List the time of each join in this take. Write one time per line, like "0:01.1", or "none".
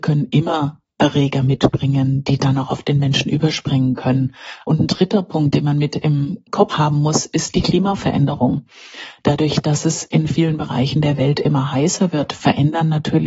0:06.7